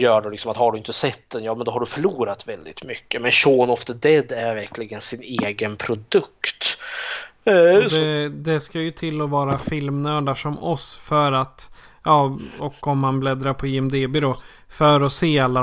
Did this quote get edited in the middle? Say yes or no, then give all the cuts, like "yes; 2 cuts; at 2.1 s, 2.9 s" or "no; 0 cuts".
no; 0 cuts